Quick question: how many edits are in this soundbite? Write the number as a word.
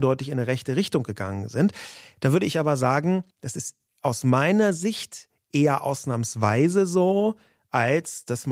one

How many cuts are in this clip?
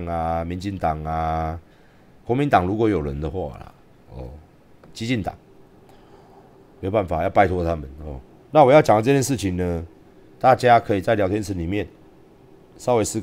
one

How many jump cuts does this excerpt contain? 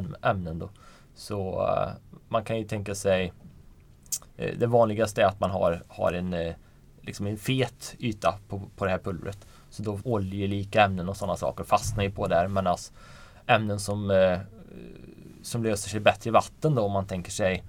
one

